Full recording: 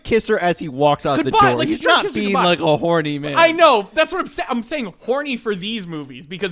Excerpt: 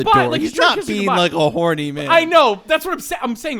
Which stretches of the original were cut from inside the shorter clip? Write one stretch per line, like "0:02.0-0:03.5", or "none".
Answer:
none